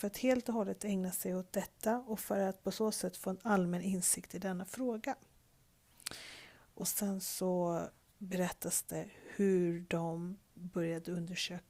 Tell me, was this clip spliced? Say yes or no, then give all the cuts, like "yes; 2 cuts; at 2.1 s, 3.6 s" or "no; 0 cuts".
no; 0 cuts